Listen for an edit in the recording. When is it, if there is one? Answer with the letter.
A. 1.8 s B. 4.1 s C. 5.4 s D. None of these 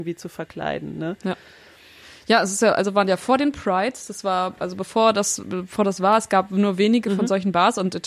D